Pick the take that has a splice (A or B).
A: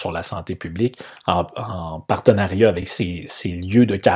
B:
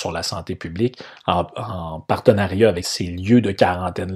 B